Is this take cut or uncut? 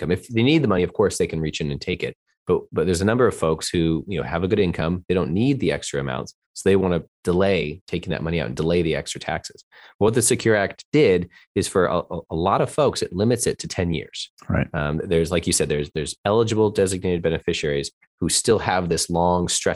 uncut